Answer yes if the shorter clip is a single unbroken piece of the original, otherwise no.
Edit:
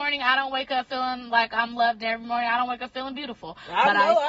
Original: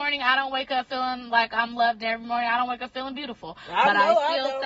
yes